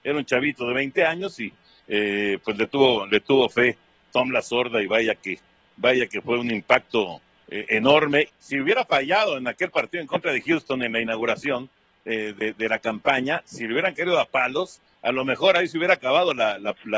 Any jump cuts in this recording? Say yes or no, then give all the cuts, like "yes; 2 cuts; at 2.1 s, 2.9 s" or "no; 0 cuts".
yes; 1 cut; at 8.3 s